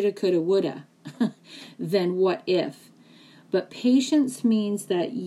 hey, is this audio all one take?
yes; 0 cuts

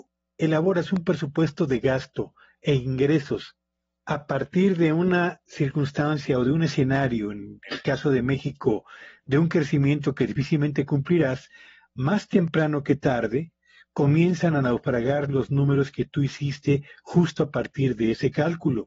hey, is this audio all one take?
yes; 0 cuts

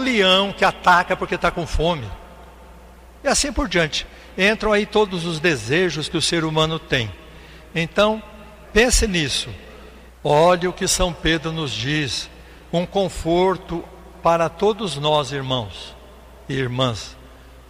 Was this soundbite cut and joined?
yes; 2 cuts; at 8.6 s, 10.1 s

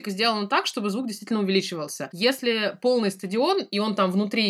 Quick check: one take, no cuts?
no; 1 cut; at 2.1 s

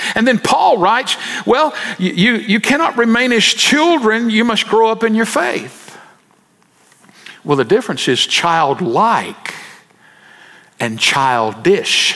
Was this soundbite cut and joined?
no; 0 cuts

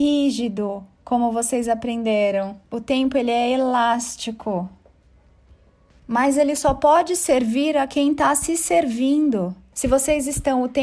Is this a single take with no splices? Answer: no; 1 cut; at 9.7 s

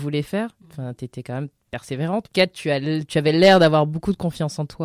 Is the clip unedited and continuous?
yes; 0 cuts

